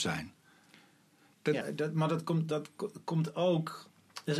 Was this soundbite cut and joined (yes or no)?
yes